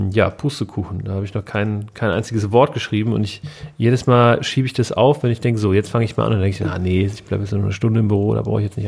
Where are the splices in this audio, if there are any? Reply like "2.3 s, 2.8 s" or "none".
none